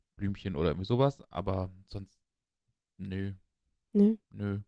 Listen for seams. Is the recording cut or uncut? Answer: uncut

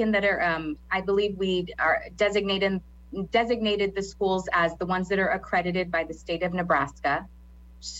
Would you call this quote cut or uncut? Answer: uncut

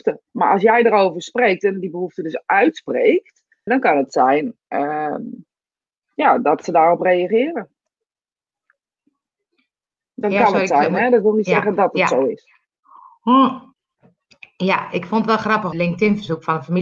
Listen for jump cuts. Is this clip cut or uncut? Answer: cut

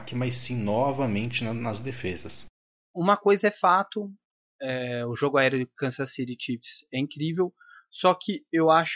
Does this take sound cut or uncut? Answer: uncut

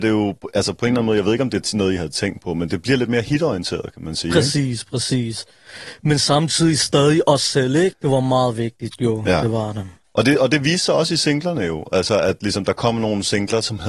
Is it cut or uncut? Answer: cut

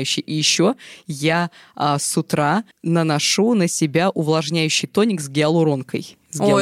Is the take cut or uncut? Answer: cut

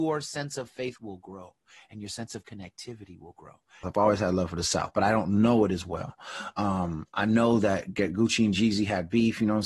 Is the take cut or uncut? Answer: cut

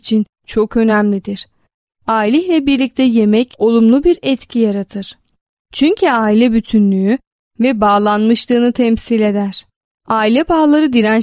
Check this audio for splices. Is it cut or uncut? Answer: uncut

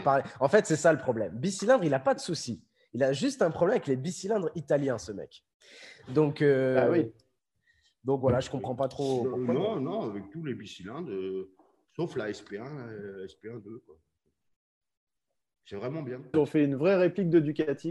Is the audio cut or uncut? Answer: cut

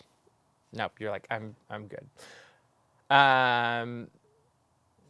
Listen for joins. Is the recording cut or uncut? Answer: cut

